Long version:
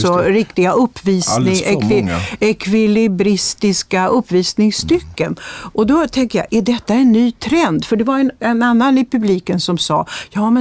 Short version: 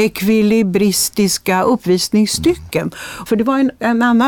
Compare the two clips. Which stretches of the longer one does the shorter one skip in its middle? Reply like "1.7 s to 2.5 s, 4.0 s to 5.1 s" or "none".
5.7 s to 7.9 s